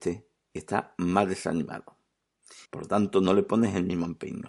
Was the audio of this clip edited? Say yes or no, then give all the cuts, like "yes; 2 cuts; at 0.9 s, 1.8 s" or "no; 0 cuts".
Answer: yes; 1 cut; at 2.7 s